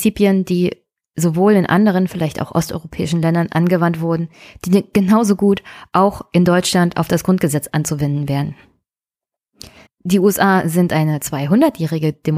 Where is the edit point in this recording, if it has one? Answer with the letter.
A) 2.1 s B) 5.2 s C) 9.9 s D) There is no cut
C